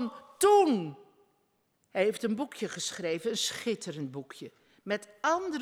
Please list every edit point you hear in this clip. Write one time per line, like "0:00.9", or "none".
0:01.7

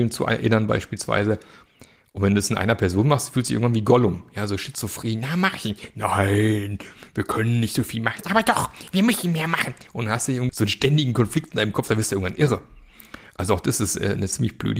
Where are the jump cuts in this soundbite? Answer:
0:10.5

